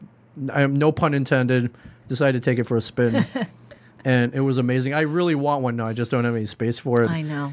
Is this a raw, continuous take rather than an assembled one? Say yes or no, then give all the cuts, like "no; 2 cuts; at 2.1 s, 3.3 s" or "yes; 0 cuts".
yes; 0 cuts